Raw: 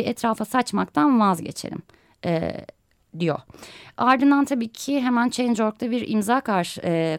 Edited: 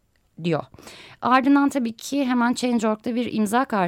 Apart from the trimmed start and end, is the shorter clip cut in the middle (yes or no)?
no